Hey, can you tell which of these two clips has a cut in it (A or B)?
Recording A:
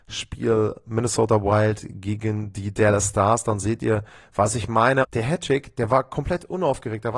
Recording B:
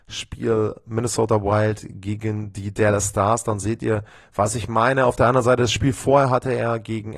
A